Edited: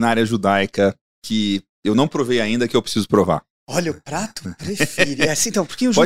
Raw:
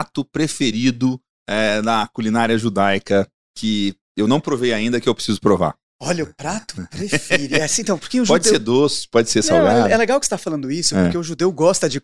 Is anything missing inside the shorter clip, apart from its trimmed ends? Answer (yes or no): no